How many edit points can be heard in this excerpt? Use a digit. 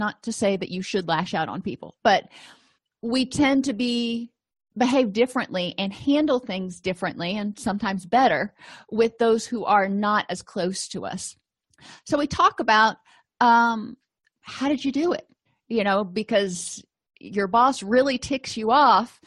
1